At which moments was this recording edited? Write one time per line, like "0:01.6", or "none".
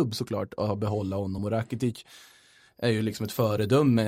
none